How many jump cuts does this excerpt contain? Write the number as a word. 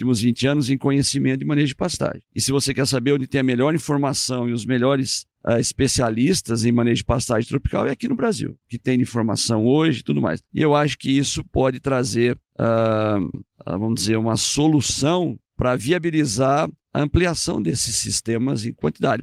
two